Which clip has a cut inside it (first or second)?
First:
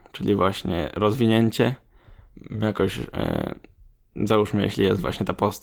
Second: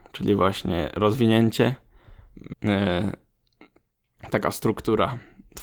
second